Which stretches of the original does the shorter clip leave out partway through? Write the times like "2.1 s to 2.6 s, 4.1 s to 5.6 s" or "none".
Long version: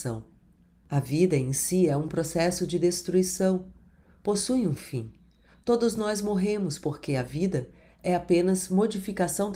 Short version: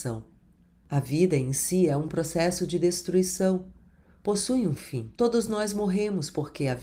5.1 s to 5.6 s